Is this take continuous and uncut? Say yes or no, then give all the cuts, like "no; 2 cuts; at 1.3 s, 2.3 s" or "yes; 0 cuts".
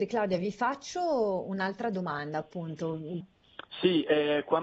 no; 1 cut; at 3.2 s